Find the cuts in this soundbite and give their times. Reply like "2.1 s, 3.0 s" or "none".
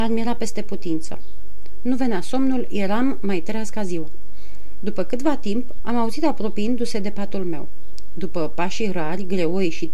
5.8 s